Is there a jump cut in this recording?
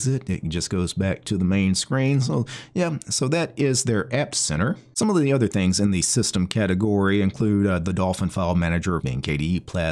yes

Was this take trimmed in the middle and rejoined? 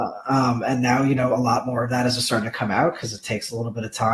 no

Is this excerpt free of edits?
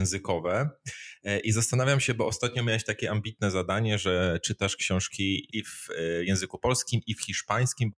yes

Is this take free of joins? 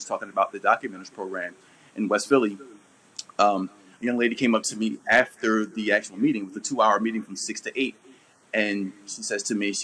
yes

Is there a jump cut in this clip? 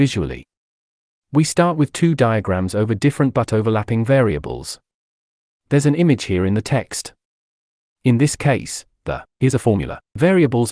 no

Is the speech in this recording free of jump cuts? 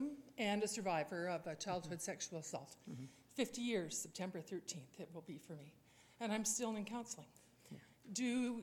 yes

